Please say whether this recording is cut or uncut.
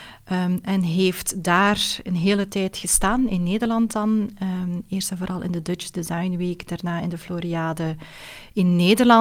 uncut